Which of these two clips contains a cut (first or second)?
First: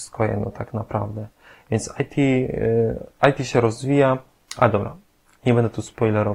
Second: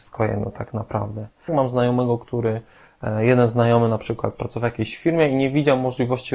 second